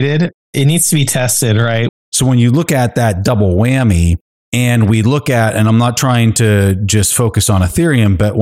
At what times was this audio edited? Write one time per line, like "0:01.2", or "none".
0:01.9

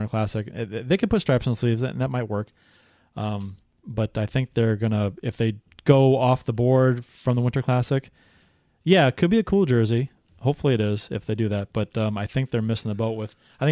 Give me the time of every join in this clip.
none

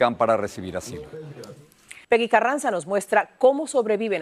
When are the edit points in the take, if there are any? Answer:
0:02.0

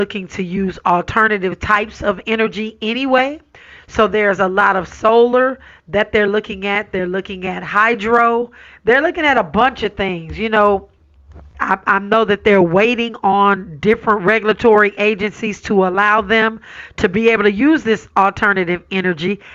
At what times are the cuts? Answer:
0:11.5

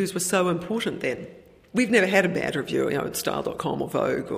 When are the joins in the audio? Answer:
none

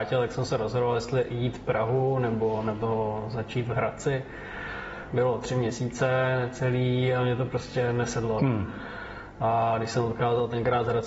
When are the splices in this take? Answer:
0:05.1
0:08.4

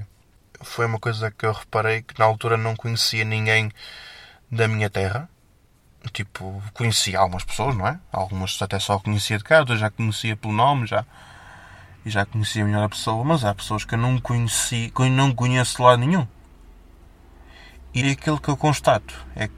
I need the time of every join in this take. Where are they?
0:18.0

